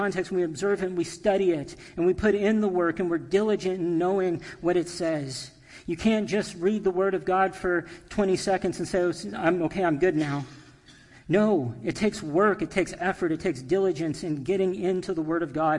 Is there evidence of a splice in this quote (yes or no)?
no